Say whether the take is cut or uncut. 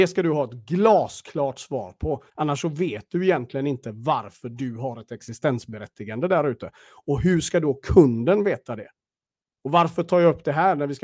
cut